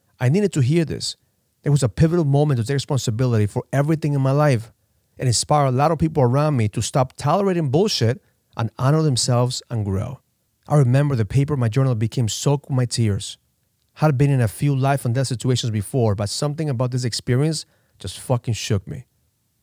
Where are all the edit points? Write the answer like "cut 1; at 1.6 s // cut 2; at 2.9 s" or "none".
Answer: cut 1; at 1.6 s // cut 2; at 10.5 s